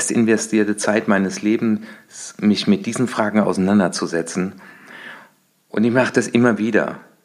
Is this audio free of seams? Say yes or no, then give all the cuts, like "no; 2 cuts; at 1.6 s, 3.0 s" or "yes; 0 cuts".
yes; 0 cuts